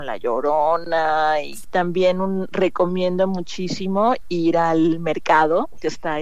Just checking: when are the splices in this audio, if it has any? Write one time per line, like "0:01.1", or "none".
0:01.6